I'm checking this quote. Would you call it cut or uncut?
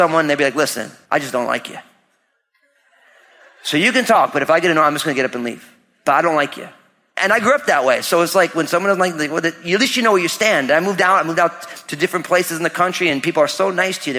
uncut